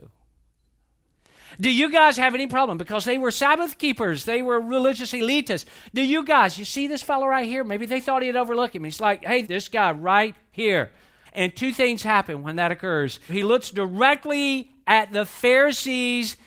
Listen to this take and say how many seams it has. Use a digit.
3